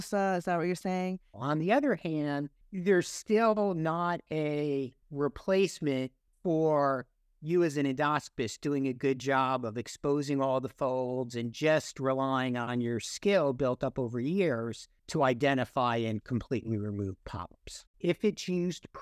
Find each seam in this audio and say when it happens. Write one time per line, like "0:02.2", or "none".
0:01.3
0:05.0
0:17.9